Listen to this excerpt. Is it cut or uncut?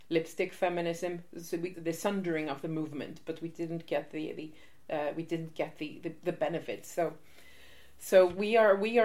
cut